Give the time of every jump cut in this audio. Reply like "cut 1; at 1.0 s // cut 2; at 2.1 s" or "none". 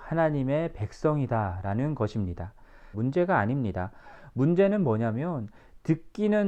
cut 1; at 2.9 s